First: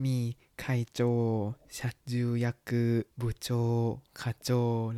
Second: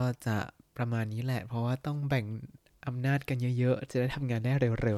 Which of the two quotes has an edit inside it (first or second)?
first